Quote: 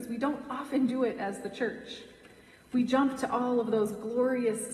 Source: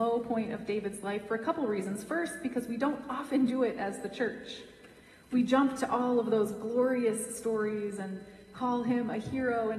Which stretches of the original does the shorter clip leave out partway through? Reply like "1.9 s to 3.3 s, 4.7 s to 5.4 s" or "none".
none